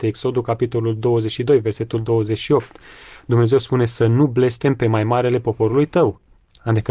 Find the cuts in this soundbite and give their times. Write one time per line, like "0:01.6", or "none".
none